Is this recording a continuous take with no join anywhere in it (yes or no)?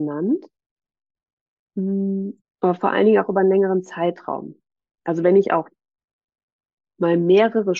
no